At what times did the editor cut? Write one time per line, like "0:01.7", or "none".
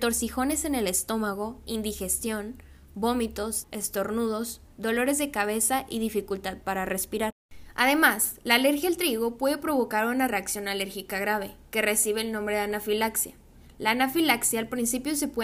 0:03.6